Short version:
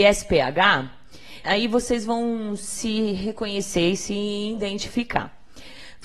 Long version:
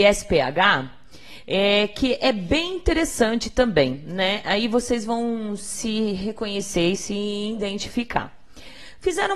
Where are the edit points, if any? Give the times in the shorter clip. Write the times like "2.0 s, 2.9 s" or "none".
1.4 s